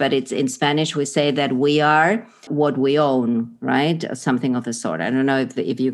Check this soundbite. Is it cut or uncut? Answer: cut